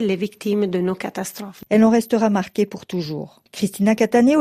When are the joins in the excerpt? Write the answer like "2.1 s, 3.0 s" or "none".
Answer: 1.7 s, 3.5 s